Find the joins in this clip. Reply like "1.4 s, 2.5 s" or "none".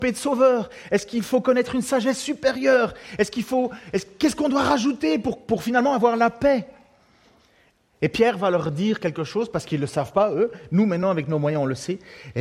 none

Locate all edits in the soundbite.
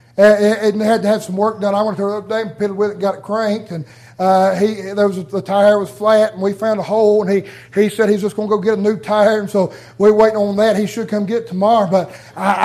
none

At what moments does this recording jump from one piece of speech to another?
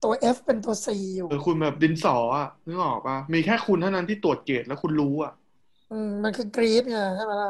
1.3 s

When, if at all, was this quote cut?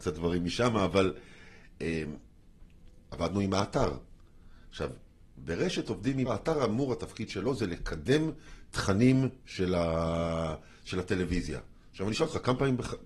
6.3 s

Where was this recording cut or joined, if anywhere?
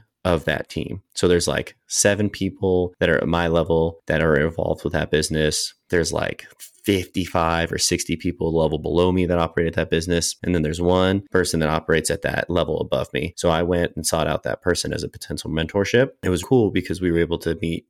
16.4 s

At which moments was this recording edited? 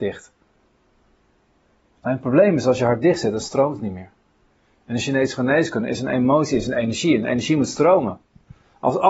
none

